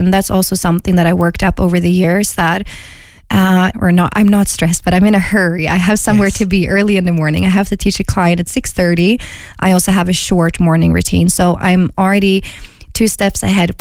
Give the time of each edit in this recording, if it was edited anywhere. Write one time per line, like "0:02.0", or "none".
0:03.7